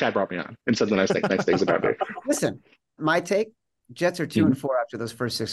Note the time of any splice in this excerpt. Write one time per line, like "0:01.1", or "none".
none

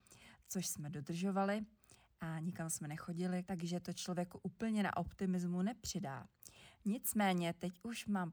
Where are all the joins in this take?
0:03.4

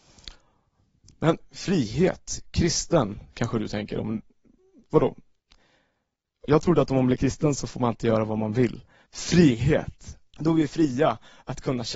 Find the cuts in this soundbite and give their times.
0:09.1
0:10.3

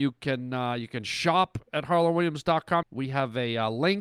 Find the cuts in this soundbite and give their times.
0:02.8

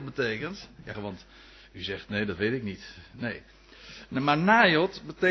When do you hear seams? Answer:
0:00.9

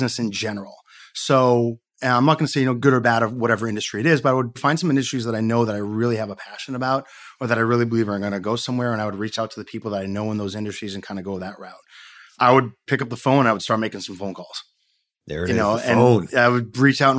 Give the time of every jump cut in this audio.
0:01.0

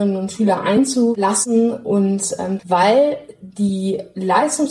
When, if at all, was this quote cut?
0:02.6

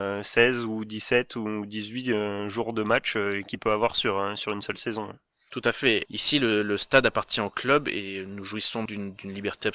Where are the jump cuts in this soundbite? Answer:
0:06.1
0:08.9

